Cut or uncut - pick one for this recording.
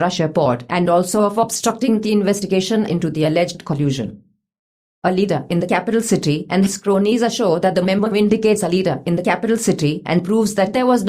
uncut